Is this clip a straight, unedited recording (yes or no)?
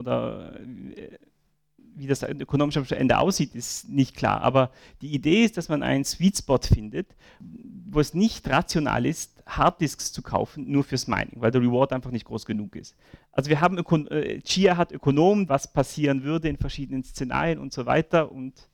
no